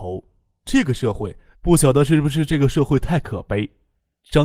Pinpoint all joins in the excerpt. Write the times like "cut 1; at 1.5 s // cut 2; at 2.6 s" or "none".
cut 1; at 1.5 s